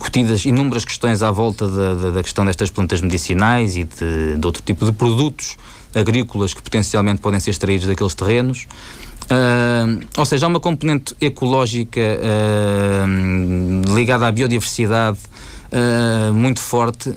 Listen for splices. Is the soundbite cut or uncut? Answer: uncut